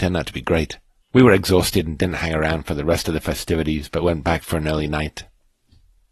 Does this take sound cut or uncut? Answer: cut